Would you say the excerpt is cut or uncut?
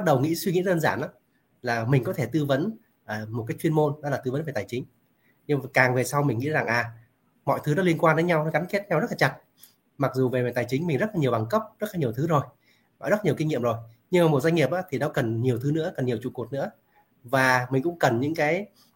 uncut